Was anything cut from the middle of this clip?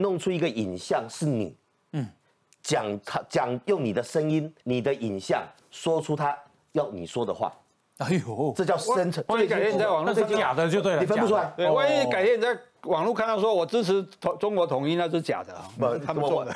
yes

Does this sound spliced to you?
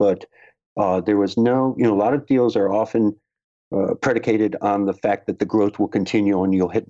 no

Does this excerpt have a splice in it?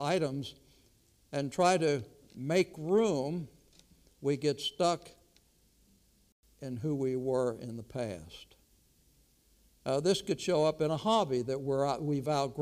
no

